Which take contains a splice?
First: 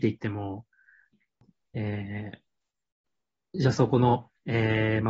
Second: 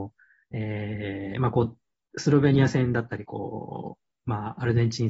first; 1 cut; at 1.7 s

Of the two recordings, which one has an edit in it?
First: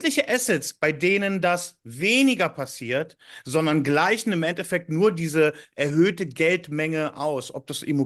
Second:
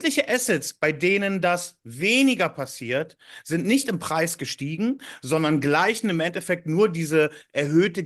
first; 1 cut; at 3.4 s

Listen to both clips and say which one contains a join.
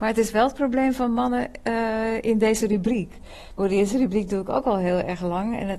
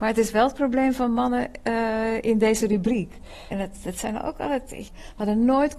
second; 2 cuts; at 3.5 s, 4.9 s

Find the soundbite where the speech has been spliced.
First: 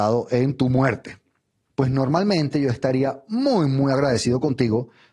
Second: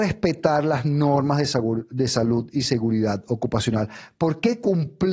first; 1 cut; at 1.7 s

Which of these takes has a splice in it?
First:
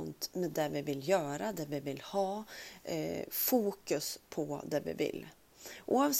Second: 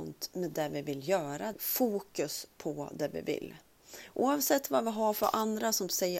second; 1 cut; at 1.5 s

